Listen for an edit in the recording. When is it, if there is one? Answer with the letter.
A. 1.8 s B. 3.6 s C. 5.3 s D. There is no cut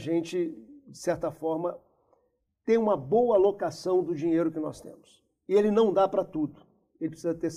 D